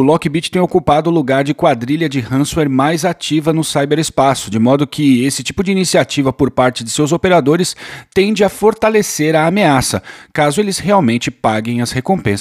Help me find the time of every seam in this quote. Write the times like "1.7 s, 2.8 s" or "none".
none